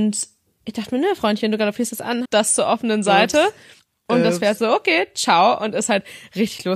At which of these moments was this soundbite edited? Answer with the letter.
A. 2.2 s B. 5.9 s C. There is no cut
A